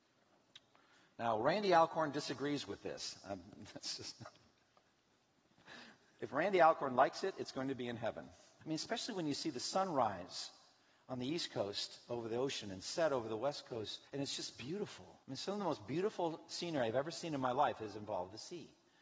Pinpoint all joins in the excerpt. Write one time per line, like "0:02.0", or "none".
0:08.6
0:14.1
0:15.2